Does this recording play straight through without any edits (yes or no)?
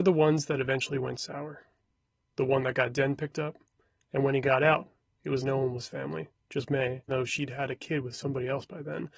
no